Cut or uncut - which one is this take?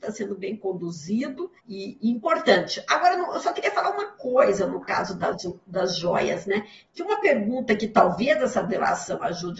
cut